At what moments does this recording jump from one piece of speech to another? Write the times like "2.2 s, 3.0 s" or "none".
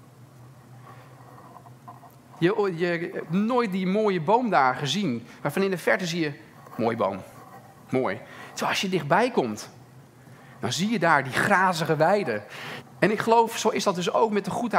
2.4 s, 12.8 s